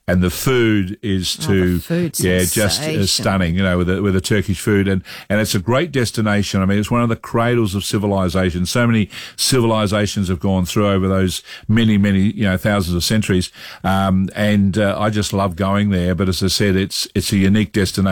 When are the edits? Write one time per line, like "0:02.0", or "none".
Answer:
none